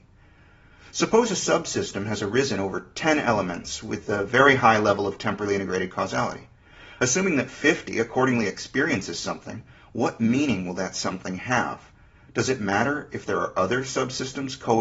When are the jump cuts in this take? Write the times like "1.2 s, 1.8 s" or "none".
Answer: none

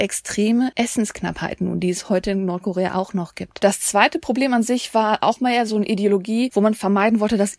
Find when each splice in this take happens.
none

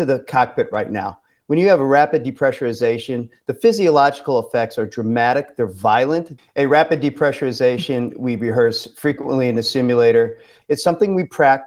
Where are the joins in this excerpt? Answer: 6.4 s, 10.6 s

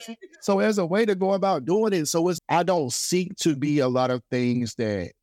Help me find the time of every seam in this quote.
2.4 s

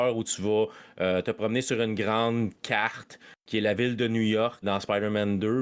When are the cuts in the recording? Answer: 4.6 s

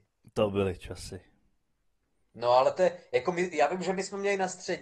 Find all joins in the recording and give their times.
none

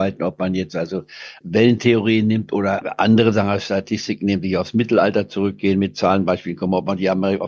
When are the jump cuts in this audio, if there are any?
none

